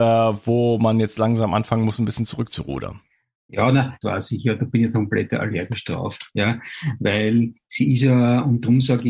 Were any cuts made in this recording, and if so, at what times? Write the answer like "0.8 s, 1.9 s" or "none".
4.0 s

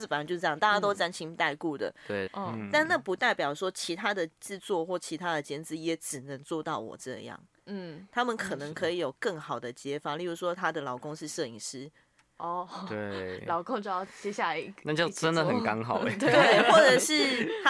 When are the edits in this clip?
2.3 s

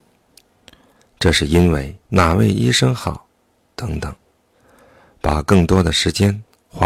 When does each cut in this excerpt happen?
1.0 s, 2.1 s

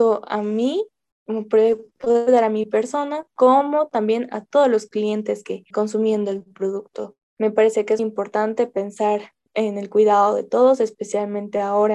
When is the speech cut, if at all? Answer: 5.7 s, 8.0 s

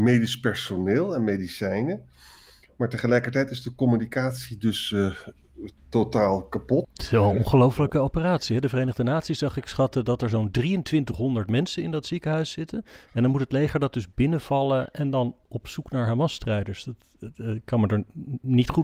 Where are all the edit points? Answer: 6.8 s

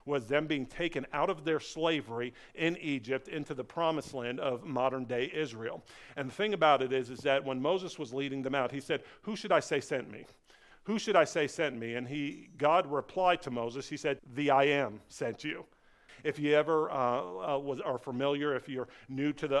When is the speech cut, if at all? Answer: 14.2 s, 16.1 s

